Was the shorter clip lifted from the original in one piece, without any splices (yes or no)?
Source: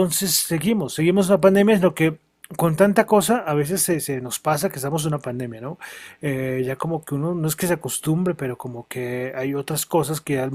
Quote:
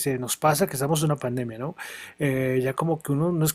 yes